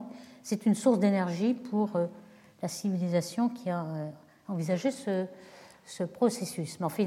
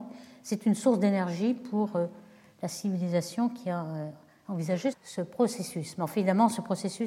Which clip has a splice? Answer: second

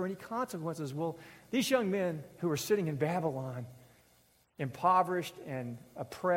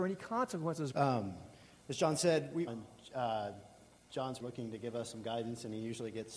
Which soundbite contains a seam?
second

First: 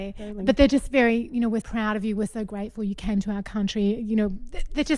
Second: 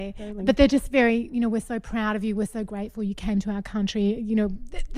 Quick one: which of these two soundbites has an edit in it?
first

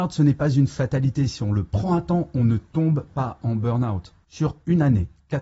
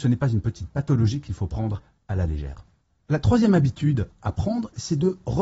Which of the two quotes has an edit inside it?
first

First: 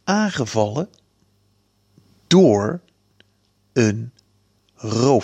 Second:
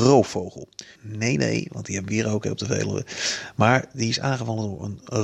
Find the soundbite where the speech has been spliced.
second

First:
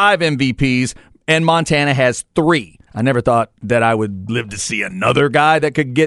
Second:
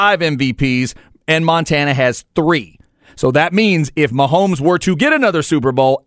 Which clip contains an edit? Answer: first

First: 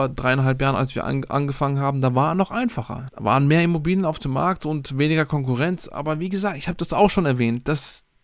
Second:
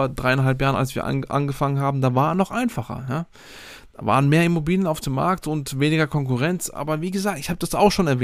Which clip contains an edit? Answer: first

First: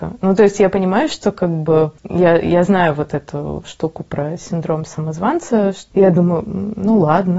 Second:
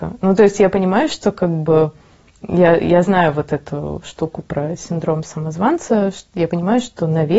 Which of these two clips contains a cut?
first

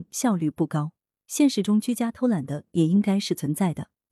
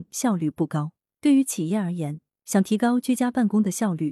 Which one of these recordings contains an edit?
first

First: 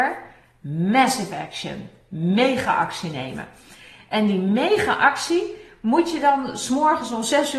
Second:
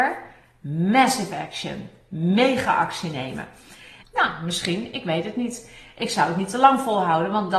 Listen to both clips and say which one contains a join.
second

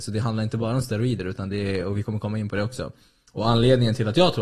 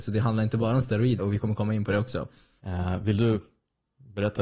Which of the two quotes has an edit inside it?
second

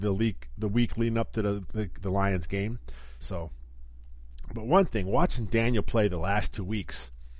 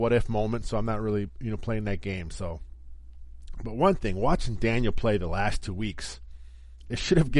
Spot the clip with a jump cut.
first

